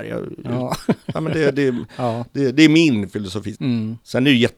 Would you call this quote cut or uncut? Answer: cut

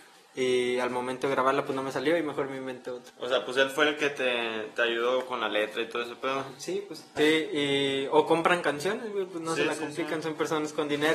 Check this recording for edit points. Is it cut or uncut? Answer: cut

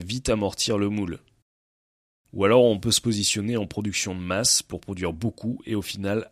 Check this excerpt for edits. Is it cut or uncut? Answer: uncut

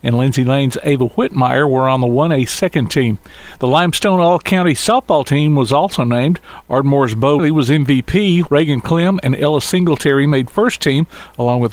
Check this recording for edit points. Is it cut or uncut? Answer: cut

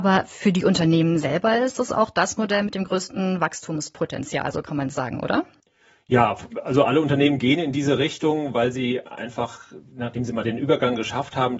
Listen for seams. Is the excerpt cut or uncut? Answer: uncut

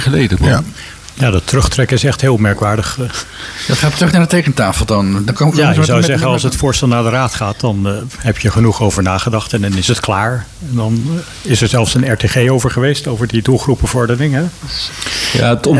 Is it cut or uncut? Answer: uncut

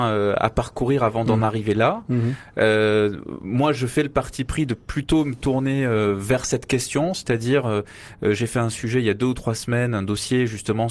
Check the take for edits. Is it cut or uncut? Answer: uncut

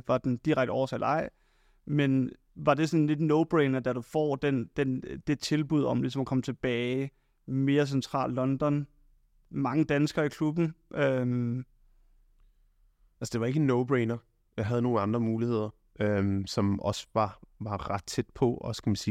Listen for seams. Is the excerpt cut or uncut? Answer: uncut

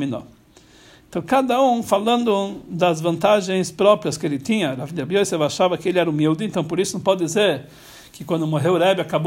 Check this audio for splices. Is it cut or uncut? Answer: uncut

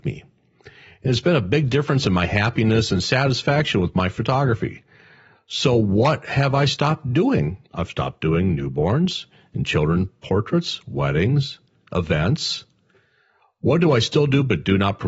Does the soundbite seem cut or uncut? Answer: cut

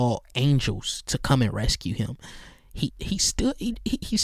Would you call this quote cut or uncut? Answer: cut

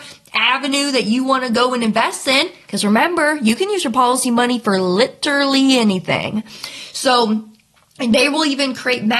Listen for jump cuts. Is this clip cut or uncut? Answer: uncut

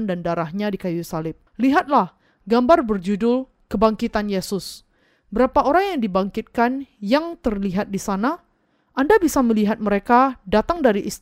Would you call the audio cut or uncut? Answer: cut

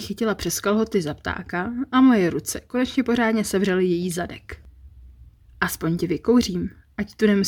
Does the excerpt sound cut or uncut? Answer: uncut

